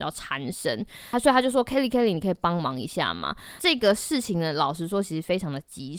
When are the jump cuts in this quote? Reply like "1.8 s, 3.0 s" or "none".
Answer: none